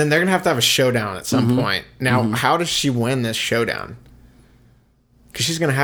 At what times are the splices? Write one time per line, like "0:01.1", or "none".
none